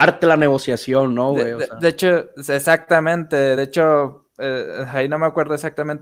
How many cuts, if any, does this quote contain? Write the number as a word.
zero